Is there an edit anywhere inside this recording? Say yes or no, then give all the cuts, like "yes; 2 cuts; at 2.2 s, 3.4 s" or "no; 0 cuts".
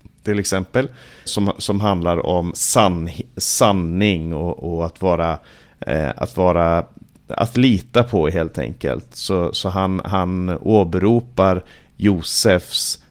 yes; 1 cut; at 1.3 s